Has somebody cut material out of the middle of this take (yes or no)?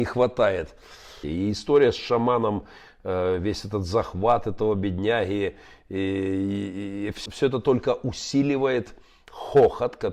yes